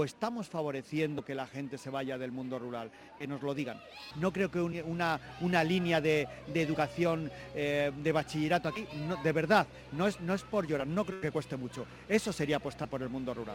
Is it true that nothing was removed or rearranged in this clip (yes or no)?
no